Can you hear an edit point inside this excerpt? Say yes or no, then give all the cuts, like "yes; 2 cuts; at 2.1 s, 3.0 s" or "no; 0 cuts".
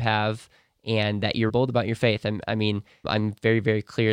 yes; 2 cuts; at 1.5 s, 3.0 s